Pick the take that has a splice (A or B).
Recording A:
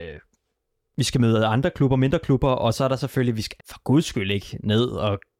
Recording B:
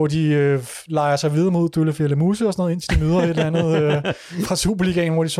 A